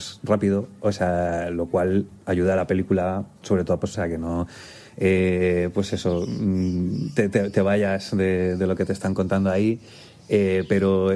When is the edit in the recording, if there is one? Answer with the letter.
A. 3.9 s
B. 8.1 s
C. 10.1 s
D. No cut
A